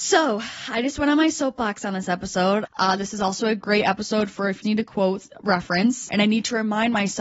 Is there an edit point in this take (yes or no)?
yes